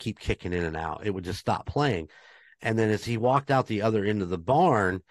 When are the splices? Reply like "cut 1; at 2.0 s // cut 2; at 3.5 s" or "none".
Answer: none